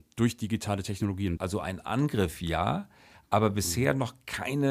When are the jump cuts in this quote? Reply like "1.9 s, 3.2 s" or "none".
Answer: 1.4 s

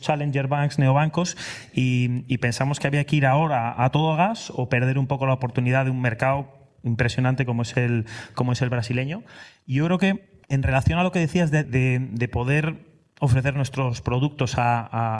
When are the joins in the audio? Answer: 10.4 s, 11.6 s

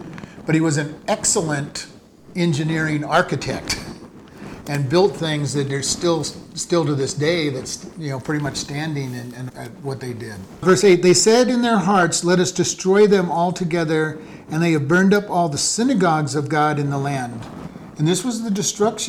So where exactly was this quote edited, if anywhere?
9.5 s, 10.6 s

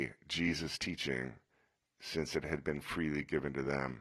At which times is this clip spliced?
none

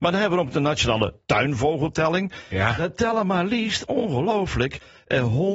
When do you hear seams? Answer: none

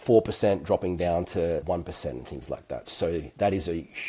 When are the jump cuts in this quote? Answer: none

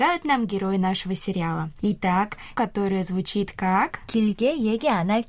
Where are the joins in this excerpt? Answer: 2.5 s

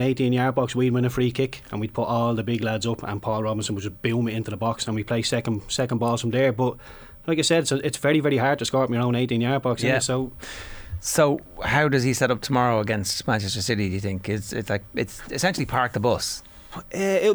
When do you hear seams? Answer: none

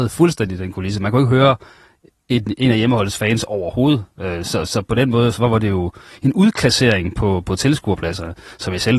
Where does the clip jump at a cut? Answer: none

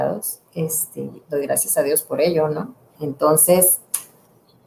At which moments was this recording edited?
3.0 s

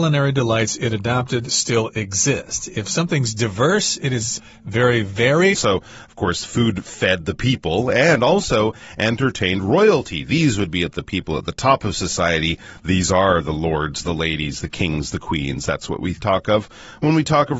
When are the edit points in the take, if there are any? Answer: 5.5 s

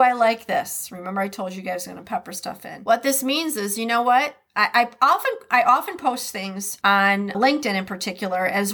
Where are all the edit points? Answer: 7.3 s

